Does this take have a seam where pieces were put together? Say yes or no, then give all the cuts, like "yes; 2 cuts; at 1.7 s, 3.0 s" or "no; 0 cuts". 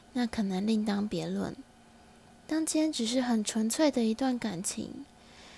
no; 0 cuts